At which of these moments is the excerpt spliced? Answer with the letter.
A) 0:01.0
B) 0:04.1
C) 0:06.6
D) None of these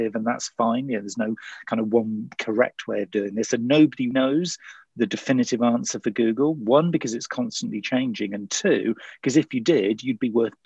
B